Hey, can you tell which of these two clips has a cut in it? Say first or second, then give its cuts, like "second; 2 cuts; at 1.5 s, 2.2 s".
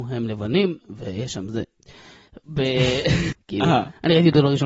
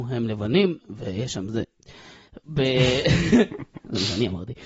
first; 1 cut; at 3.3 s